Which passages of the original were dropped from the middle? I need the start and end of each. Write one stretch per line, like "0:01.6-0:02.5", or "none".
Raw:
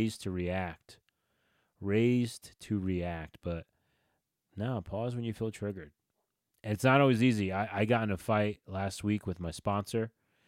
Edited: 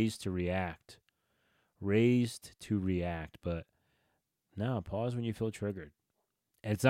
none